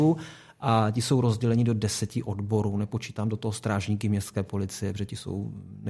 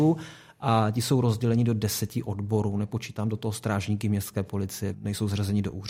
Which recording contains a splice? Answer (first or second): second